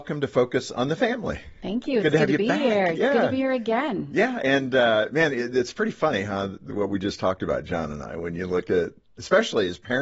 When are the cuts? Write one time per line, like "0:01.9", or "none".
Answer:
none